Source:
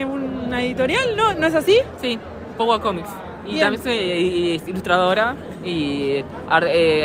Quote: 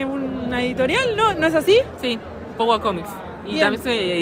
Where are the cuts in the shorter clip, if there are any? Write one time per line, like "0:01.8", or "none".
none